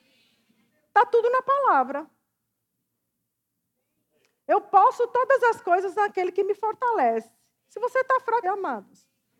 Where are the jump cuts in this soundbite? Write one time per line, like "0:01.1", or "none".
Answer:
0:08.4